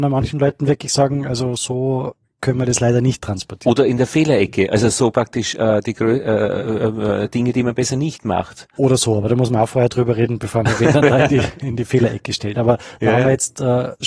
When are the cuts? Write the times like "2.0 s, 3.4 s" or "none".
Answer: none